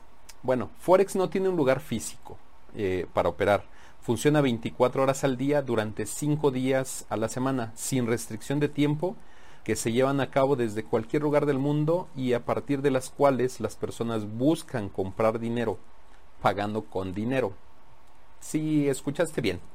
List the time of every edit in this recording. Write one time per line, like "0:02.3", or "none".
0:09.6